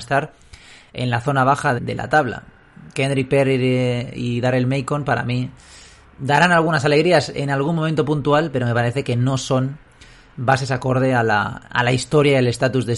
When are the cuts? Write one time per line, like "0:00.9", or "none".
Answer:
0:01.8

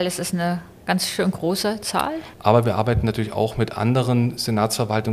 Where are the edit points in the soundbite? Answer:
0:02.3

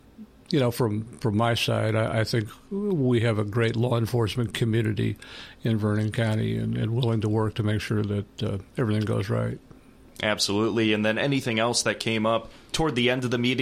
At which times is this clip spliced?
none

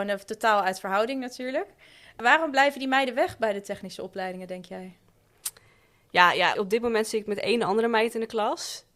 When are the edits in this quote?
0:06.5

